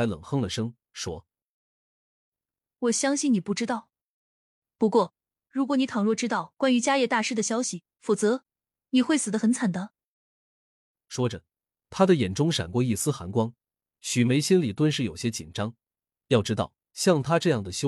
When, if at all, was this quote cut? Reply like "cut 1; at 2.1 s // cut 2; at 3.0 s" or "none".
cut 1; at 8.0 s

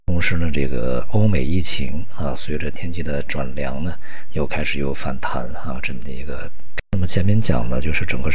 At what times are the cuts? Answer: cut 1; at 6.8 s

